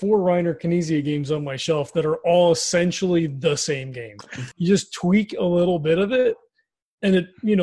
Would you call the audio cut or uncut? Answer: cut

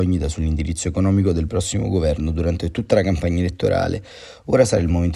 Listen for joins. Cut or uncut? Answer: uncut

